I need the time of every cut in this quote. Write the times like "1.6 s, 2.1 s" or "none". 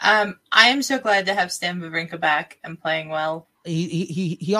3.6 s

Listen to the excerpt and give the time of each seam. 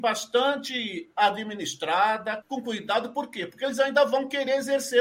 2.4 s

